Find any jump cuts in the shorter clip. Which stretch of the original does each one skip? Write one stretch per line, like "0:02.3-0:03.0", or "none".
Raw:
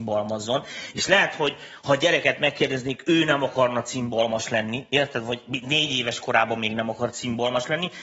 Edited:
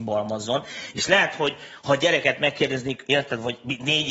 0:03.0-0:04.9